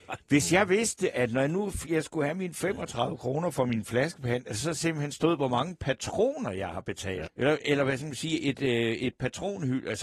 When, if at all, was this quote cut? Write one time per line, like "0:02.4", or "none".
0:07.2